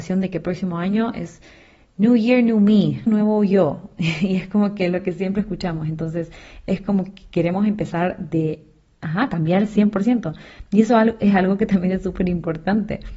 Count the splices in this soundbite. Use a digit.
1